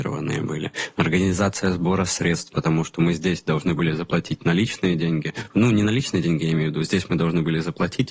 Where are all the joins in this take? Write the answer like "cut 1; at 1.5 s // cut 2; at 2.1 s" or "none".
none